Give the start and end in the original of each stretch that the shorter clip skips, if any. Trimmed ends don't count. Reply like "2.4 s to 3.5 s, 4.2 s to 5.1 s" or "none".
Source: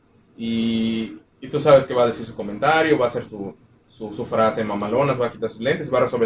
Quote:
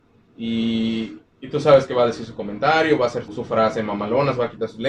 3.3 s to 4.1 s

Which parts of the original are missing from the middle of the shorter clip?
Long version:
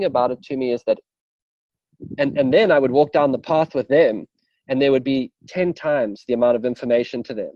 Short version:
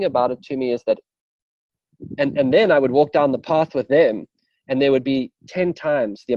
none

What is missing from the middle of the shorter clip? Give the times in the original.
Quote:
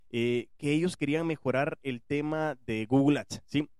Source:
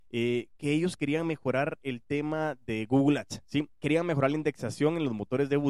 none

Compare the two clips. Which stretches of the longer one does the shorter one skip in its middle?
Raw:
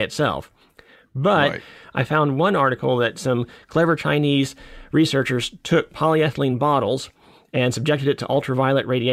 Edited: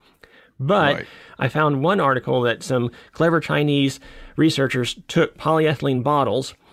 none

